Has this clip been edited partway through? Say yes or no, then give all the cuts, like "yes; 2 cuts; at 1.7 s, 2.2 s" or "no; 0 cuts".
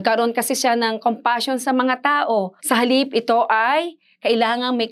yes; 1 cut; at 2.6 s